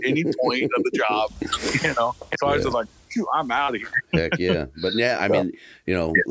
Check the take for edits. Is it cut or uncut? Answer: uncut